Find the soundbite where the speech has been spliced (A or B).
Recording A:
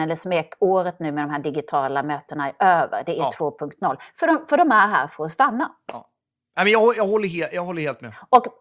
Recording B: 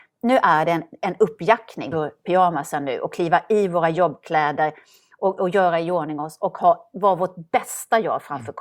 B